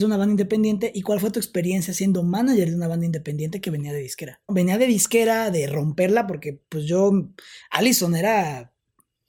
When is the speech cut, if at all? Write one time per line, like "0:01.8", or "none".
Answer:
0:04.5
0:07.6